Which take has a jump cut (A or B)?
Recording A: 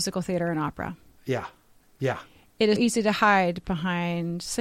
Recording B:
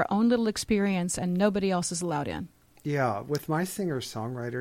A